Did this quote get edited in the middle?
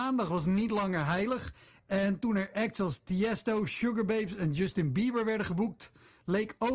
no; 0 cuts

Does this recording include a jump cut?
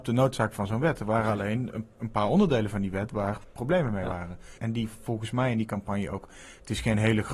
yes; 1 cut; at 4.6 s

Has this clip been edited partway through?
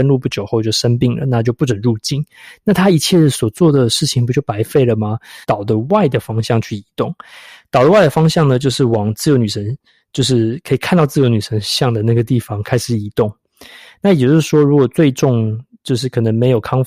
yes; 1 cut; at 5.4 s

